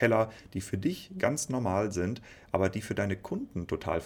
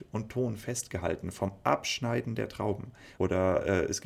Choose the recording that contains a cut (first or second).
second